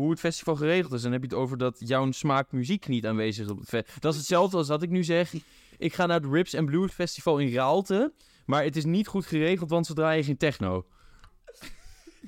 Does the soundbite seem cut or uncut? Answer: cut